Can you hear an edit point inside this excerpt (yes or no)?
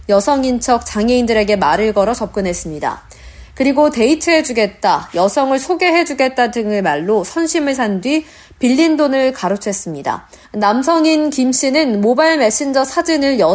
yes